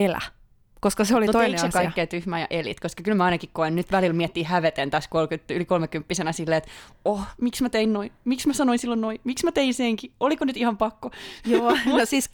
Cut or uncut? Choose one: uncut